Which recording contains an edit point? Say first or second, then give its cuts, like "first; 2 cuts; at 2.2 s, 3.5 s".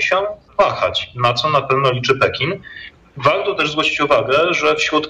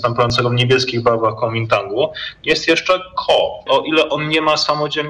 second; 1 cut; at 3.7 s